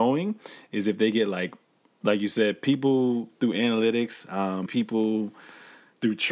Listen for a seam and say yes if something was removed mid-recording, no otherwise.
yes